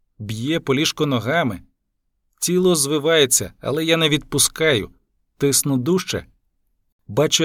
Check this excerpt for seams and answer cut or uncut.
uncut